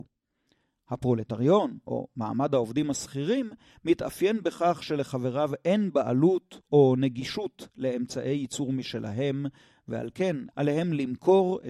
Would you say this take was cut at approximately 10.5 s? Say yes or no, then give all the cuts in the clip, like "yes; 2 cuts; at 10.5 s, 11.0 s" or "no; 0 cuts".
yes; 1 cut; at 10.5 s